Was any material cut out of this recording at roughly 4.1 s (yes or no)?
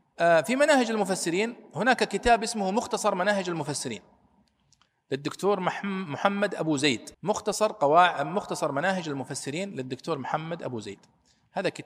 no